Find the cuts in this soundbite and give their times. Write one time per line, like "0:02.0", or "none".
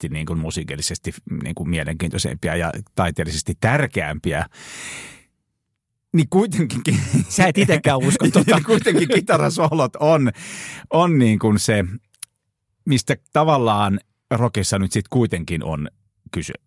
none